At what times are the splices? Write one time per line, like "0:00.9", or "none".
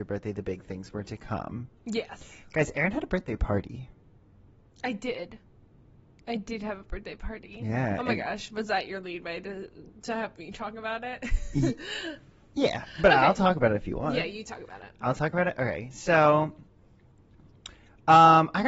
none